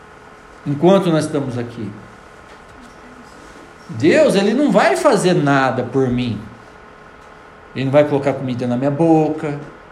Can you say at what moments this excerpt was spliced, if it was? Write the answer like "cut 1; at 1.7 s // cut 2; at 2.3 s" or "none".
none